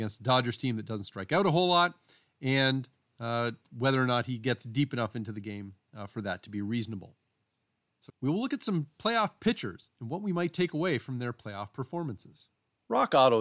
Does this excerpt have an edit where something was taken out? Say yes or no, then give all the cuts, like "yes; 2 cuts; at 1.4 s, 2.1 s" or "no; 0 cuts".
yes; 1 cut; at 8.1 s